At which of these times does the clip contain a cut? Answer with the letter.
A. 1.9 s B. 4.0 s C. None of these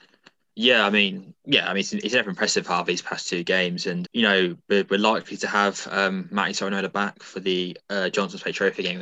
B